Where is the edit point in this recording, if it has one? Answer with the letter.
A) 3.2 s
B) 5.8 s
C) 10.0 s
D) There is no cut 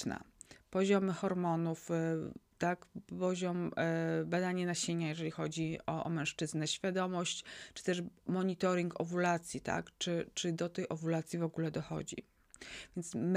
D